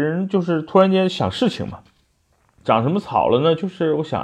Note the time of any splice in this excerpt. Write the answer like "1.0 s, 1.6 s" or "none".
2.6 s